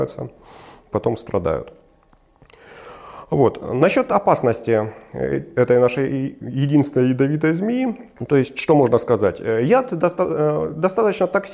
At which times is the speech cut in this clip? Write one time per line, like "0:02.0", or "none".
0:08.2